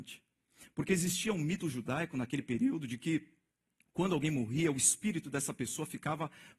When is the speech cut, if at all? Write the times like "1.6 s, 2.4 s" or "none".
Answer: none